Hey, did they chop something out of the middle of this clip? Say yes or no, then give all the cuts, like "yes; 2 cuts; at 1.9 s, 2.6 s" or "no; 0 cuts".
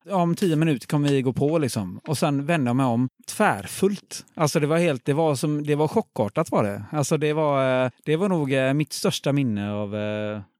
no; 0 cuts